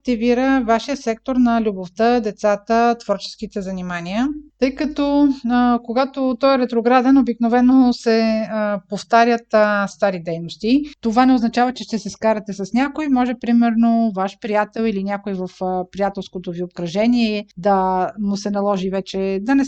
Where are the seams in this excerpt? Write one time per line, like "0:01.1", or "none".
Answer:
0:04.5
0:09.9
0:10.9

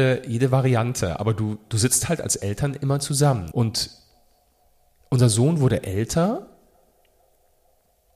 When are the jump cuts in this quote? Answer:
0:03.5

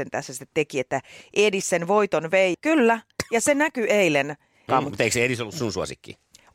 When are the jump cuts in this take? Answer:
0:02.5
0:04.7

